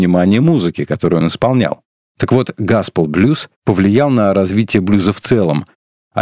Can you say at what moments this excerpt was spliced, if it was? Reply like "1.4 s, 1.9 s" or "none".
2.0 s, 3.6 s

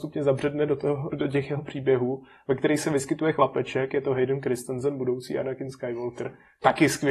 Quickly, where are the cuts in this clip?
1.1 s

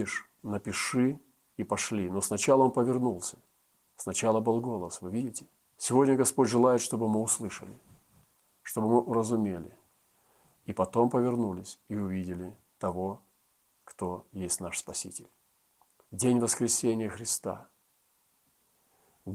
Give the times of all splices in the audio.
5.7 s, 16.0 s

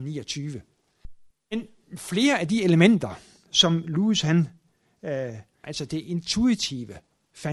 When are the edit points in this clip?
1.3 s, 5.6 s

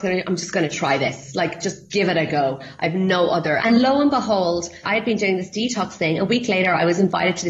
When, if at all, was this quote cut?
3.6 s, 4.8 s

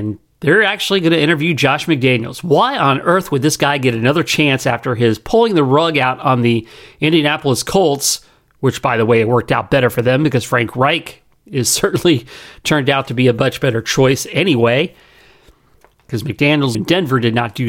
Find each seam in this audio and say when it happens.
16.7 s

